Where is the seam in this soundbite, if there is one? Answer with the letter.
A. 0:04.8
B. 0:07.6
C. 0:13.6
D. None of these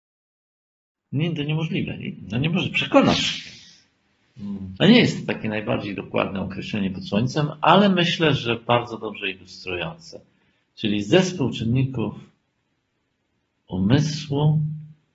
A